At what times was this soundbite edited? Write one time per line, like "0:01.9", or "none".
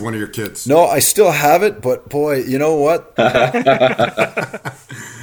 0:03.2